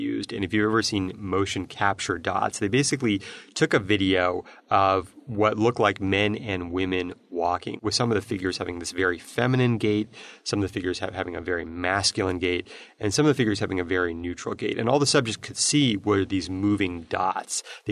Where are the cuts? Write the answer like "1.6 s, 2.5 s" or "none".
none